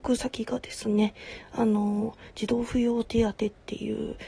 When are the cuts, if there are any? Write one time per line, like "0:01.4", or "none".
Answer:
none